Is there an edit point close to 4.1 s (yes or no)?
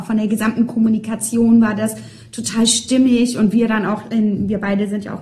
no